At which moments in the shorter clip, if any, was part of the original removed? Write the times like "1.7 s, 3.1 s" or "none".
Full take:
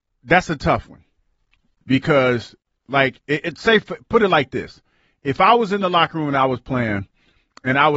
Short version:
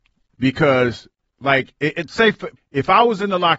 2.6 s